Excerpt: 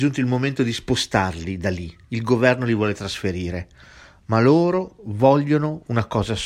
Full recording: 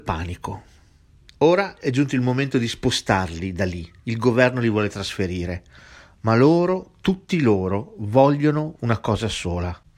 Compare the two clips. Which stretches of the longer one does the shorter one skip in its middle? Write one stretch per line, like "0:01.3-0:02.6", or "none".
0:06.9-0:07.9